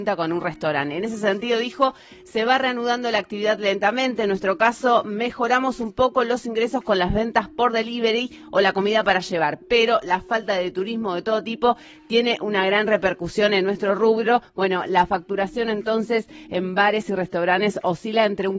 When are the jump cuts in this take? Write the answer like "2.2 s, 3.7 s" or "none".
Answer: none